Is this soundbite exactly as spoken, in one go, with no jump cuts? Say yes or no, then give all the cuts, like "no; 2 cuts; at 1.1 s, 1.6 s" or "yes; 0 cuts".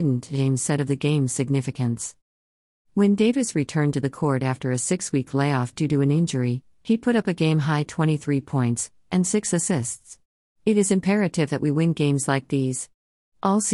no; 2 cuts; at 9.0 s, 10.5 s